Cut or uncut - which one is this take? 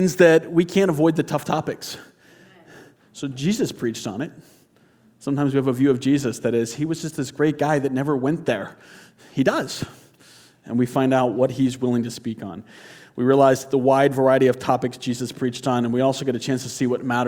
uncut